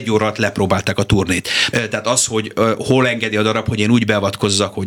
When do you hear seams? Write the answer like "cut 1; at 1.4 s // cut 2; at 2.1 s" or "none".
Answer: cut 1; at 1.7 s